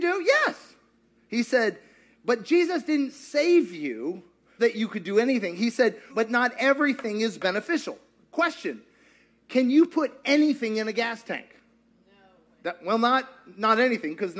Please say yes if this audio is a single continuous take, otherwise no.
no